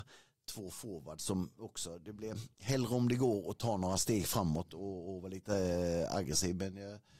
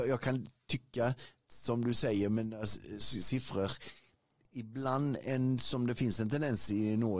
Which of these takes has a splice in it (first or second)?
first